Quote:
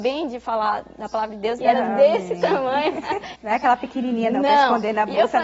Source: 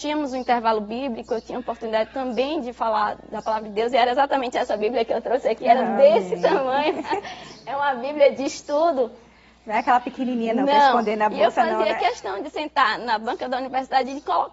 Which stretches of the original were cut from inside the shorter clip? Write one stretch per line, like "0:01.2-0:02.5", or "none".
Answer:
0:03.9-0:05.6
0:07.4-0:09.6